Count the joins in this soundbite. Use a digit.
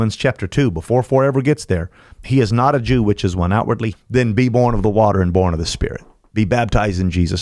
2